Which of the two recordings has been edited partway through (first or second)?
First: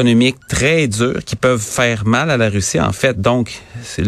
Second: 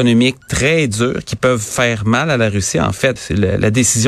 second